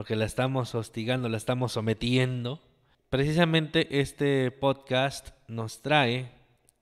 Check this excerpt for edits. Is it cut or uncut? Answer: uncut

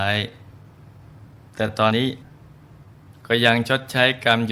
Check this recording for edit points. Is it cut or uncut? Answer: cut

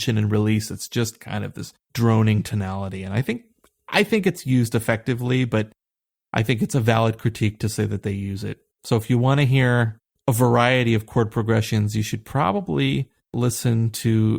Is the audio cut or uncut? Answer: cut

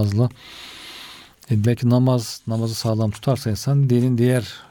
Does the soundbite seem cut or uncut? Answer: cut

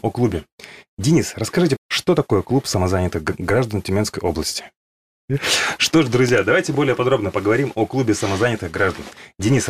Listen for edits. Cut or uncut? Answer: cut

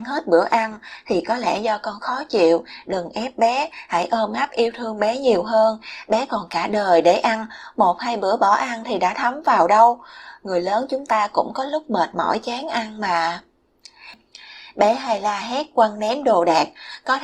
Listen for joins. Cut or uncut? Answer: uncut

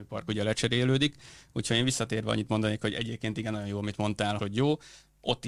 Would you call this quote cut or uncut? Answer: cut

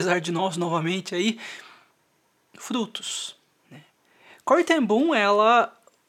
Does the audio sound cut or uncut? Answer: uncut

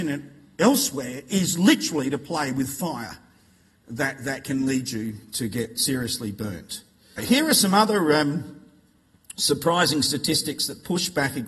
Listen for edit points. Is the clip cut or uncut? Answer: cut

